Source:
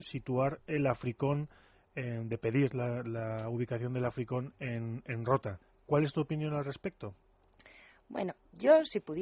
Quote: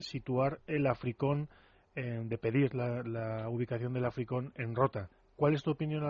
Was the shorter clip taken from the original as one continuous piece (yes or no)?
no